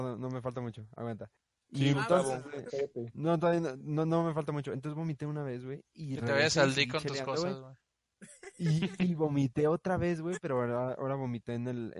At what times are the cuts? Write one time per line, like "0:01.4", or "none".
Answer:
none